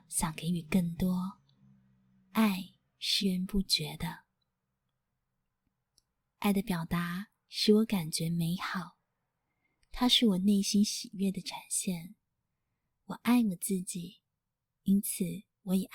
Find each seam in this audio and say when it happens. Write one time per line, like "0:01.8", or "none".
0:03.2